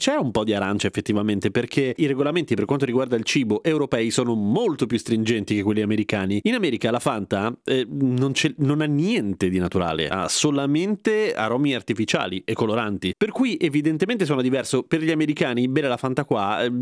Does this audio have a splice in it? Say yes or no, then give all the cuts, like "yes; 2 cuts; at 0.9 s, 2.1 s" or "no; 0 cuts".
no; 0 cuts